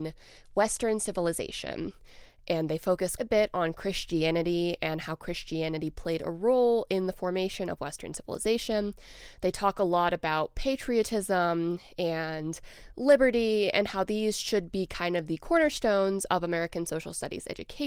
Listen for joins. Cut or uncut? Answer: cut